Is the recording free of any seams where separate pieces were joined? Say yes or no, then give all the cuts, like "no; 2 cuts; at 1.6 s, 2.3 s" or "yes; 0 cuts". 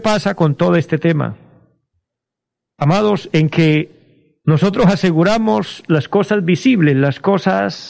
yes; 0 cuts